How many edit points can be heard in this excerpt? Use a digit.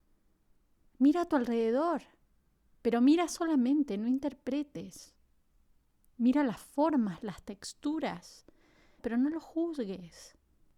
2